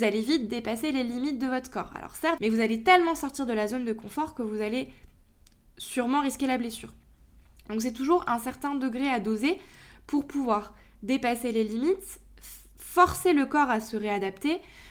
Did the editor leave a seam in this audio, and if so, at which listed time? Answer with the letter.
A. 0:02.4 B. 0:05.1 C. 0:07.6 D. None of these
A